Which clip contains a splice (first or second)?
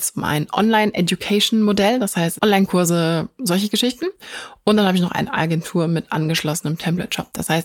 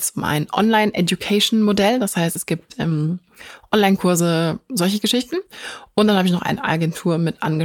first